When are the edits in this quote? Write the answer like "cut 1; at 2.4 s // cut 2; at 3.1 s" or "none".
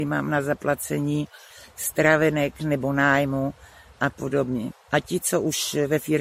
cut 1; at 4.8 s